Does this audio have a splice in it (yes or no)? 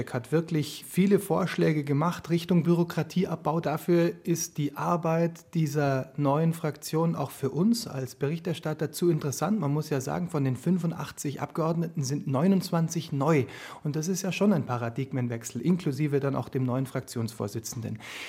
yes